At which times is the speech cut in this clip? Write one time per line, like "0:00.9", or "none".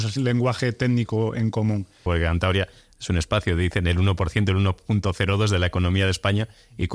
0:02.1